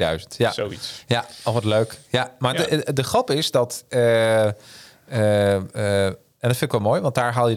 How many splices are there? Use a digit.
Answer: 0